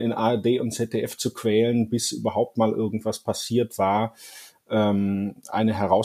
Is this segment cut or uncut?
uncut